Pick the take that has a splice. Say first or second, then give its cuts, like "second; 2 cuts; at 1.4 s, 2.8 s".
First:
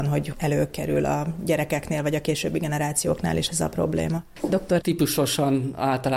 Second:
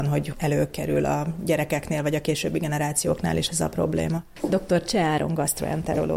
first; 1 cut; at 4.8 s